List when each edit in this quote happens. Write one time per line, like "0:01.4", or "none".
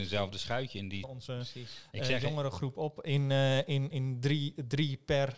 0:01.0
0:03.9